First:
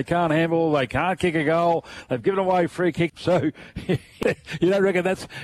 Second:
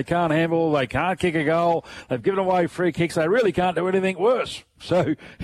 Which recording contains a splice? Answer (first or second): first